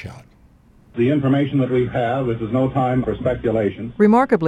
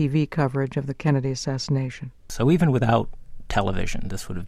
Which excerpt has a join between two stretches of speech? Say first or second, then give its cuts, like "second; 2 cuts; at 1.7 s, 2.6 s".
first; 2 cuts; at 0.9 s, 3.0 s